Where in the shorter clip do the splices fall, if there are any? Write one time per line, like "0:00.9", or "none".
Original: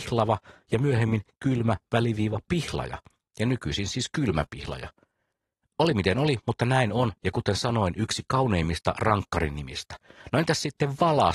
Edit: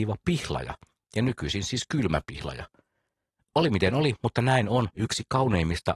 0:05.0